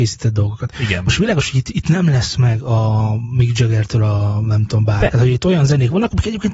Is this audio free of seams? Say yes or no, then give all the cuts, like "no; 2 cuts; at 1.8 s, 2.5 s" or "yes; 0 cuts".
no; 1 cut; at 5.1 s